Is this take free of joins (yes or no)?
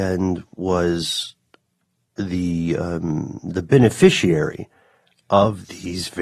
yes